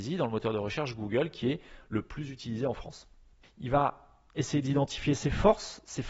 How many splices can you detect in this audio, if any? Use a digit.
1